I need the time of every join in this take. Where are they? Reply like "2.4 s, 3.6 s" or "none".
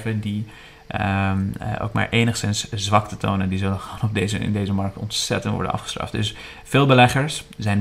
none